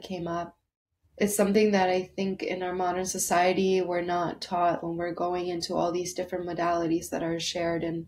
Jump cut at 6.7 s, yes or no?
no